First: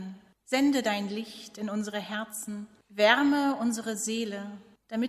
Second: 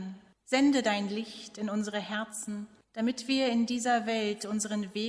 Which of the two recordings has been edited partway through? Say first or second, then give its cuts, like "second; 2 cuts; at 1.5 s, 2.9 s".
second; 1 cut; at 2.8 s